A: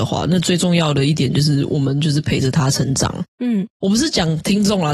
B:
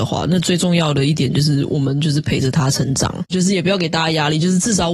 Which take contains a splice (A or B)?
B